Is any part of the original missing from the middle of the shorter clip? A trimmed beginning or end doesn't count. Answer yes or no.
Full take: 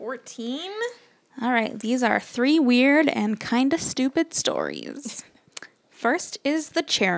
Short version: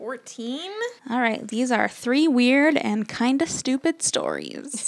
yes